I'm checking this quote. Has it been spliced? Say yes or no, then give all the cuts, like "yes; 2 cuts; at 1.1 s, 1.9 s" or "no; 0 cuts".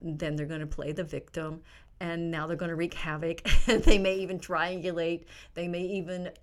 no; 0 cuts